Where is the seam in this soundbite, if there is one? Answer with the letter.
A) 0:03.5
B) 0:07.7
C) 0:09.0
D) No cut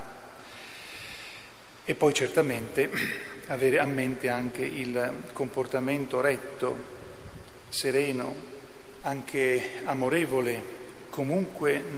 C